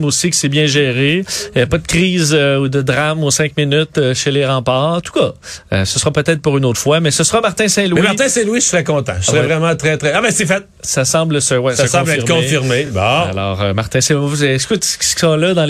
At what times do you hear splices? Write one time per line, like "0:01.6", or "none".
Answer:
none